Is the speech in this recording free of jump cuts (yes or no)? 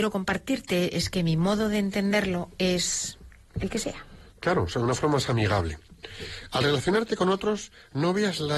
yes